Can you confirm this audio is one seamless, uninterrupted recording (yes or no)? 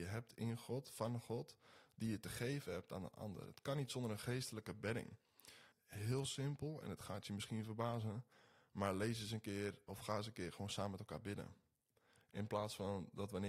no